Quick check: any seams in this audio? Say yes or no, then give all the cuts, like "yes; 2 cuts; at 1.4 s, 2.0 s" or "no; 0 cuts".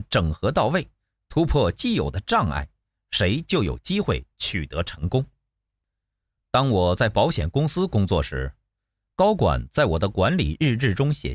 no; 0 cuts